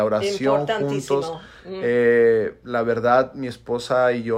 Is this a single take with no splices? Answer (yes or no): yes